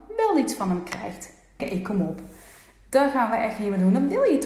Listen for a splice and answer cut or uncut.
cut